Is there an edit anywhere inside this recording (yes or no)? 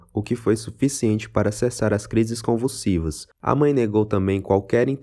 yes